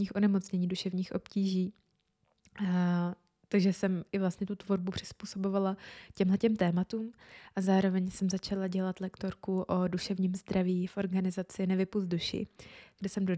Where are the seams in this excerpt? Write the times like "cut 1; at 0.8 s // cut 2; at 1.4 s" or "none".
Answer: none